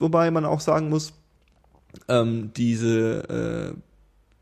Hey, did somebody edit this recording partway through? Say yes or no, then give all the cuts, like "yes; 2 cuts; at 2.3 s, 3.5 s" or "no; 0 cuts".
no; 0 cuts